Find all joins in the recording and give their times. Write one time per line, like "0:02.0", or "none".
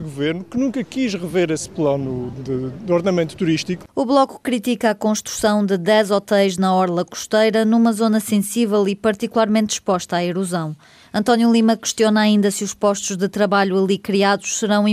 0:02.3

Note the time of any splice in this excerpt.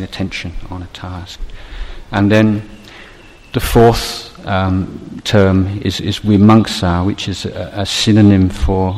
none

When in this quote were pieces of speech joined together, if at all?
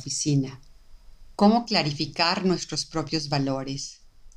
0:01.4

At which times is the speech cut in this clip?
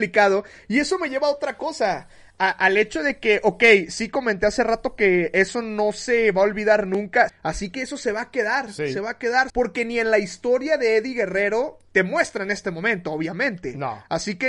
0:07.3
0:09.5

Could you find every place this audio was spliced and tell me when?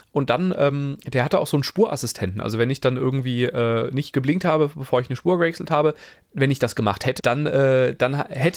0:07.2

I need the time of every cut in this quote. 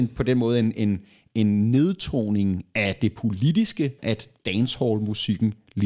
0:04.0

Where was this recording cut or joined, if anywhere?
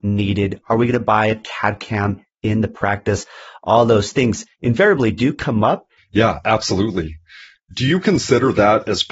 0:06.0

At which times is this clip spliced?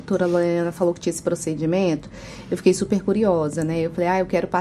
none

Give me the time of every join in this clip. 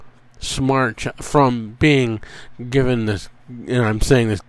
0:03.4

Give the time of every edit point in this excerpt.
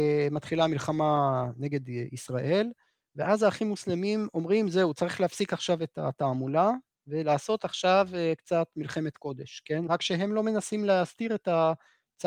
0:09.9

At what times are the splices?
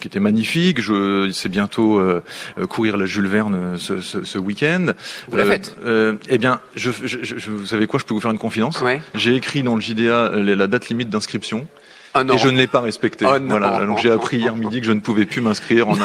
none

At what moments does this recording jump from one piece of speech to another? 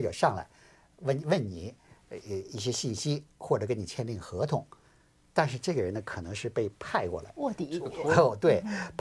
none

